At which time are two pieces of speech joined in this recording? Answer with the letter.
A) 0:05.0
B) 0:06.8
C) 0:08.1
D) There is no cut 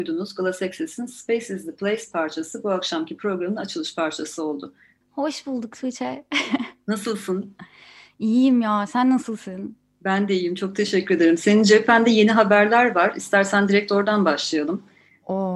A